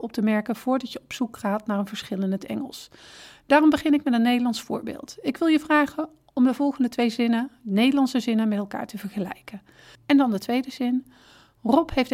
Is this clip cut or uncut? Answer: cut